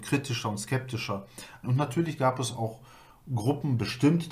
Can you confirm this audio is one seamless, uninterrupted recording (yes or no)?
no